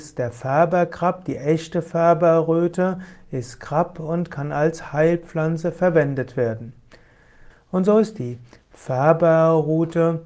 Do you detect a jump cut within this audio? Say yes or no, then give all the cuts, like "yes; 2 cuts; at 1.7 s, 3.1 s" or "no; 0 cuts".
yes; 1 cut; at 7.5 s